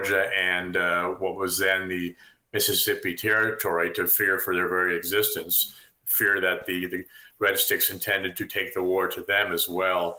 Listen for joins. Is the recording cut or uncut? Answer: uncut